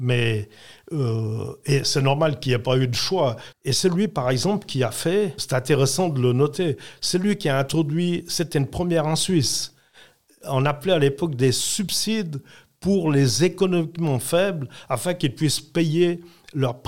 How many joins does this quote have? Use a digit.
2